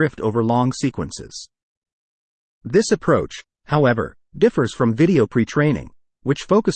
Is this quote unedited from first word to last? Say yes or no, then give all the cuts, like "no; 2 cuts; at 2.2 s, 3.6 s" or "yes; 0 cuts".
no; 1 cut; at 2.5 s